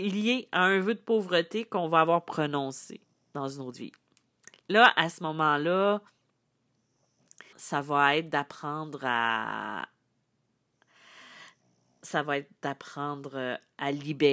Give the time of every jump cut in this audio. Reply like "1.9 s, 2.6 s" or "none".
7.5 s

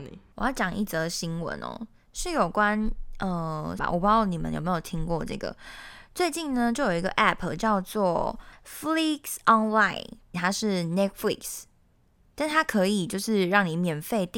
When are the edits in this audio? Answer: 3.8 s, 10.3 s

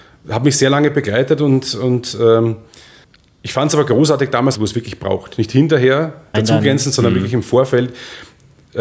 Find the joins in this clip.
4.5 s, 6.3 s

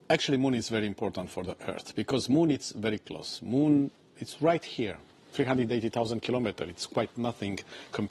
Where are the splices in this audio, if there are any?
none

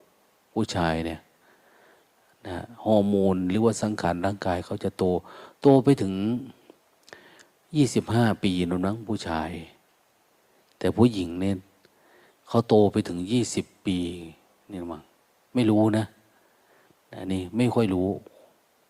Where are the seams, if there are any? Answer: none

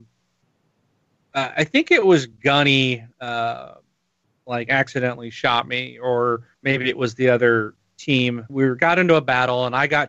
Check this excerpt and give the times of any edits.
6.5 s, 8.5 s

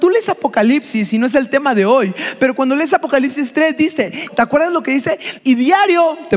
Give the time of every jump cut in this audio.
4.3 s, 5.4 s

